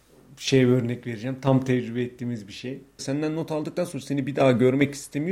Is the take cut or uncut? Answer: cut